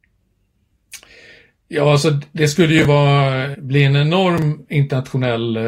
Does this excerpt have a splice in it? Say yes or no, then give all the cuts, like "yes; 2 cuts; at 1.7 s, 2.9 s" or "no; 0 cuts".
yes; 1 cut; at 3.5 s